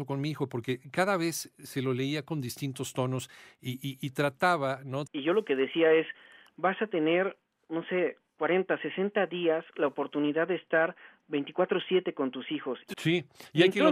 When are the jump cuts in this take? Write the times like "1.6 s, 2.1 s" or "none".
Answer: 5.1 s, 12.9 s